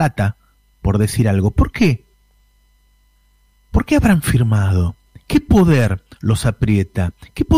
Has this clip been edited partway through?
no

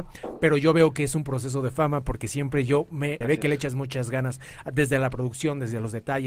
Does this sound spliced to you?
yes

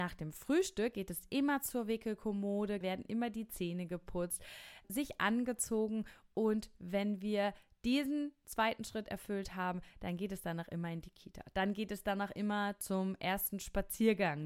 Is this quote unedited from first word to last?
no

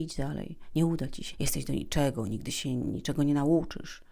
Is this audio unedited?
no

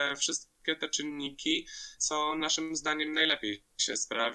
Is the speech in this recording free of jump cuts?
no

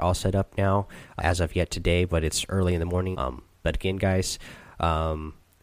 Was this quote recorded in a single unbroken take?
no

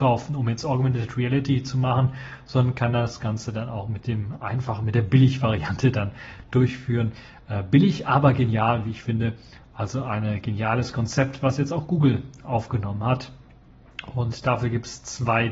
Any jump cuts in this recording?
no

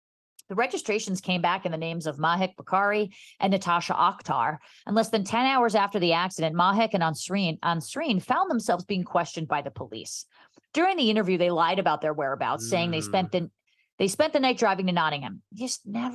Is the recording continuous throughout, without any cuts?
yes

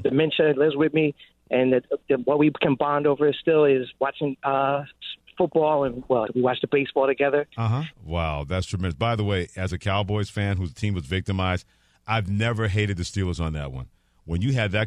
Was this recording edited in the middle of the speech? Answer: yes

